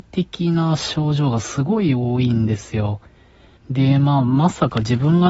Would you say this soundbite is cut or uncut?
cut